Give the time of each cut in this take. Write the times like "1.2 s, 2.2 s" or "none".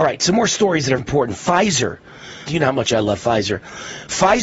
1.0 s, 2.5 s